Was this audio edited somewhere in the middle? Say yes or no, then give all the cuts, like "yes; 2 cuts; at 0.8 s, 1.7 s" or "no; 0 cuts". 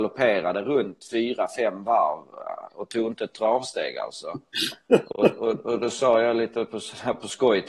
no; 0 cuts